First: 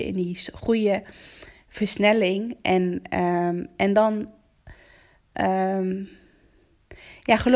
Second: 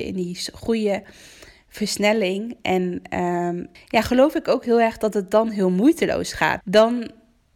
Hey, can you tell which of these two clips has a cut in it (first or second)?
second